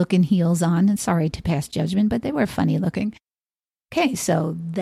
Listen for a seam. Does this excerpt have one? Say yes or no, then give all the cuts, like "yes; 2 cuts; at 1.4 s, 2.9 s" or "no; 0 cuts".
yes; 1 cut; at 3.7 s